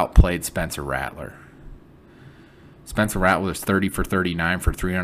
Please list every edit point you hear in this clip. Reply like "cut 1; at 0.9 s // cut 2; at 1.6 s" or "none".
none